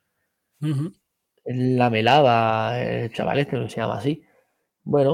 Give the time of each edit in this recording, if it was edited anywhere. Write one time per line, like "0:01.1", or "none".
none